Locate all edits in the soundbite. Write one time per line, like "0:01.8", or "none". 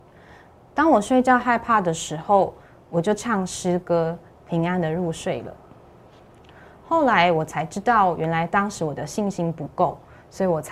0:04.4